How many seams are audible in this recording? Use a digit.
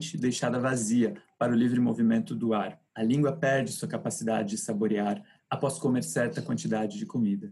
0